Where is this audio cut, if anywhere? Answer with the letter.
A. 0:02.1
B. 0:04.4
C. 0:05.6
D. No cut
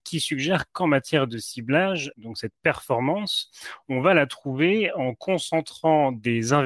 A